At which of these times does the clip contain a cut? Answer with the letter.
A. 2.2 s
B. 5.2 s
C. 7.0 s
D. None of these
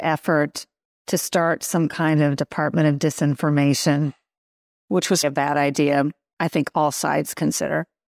B